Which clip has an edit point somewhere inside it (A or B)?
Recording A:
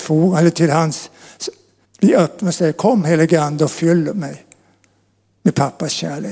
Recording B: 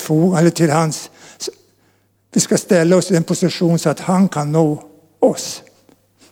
A